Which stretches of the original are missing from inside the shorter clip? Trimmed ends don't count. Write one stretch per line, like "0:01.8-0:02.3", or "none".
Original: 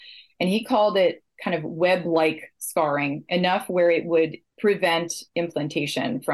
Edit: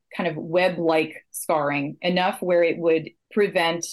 none